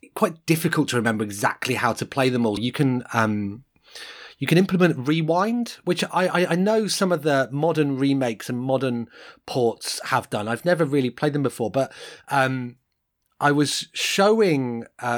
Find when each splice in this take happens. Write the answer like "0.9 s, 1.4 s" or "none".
2.6 s

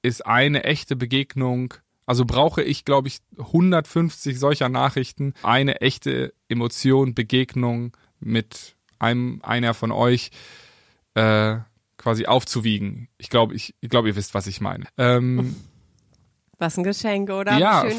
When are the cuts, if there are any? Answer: 5.4 s, 14.8 s

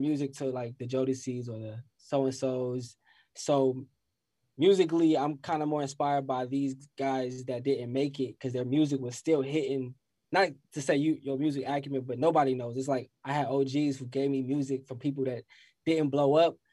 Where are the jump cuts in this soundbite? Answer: 10.2 s

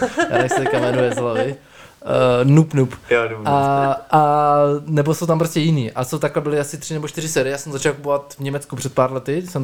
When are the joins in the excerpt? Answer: 4.1 s

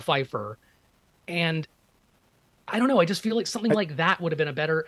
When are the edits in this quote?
none

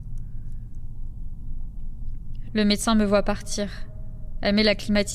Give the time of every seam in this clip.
2.4 s

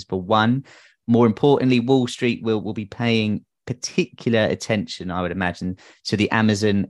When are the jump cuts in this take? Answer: none

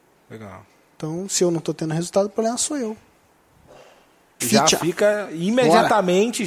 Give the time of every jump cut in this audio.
4.4 s

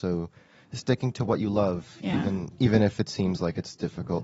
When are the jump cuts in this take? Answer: none

